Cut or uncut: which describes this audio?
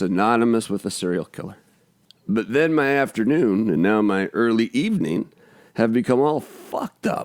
cut